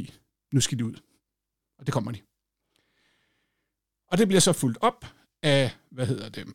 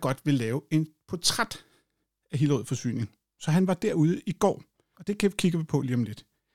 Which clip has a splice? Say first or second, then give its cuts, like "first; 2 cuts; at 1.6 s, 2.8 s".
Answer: second; 1 cut; at 4.9 s